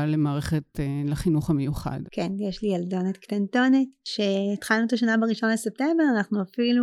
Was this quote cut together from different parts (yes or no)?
yes